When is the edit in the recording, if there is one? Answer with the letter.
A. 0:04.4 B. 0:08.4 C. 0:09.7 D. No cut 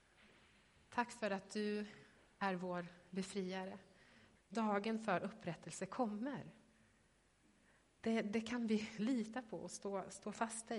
A